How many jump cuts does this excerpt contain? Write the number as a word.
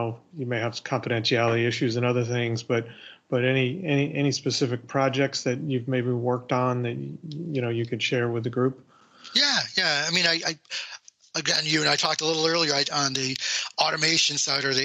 one